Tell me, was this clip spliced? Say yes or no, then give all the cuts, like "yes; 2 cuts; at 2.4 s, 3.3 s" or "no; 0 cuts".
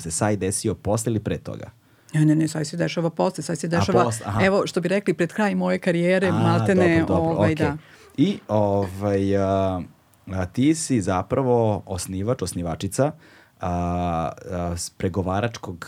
no; 0 cuts